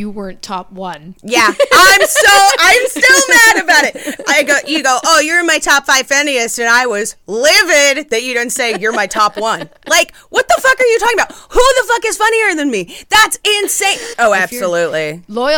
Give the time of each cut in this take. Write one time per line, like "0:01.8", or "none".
0:14.1